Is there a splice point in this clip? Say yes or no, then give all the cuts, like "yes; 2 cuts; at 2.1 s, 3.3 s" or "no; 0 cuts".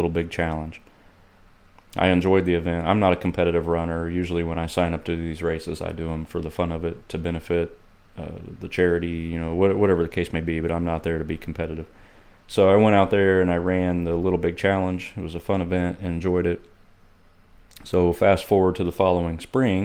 no; 0 cuts